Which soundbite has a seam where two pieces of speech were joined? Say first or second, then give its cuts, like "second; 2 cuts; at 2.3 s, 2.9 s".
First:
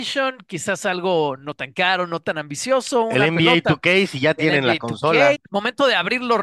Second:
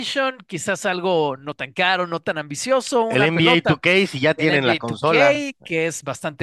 first; 1 cut; at 5.3 s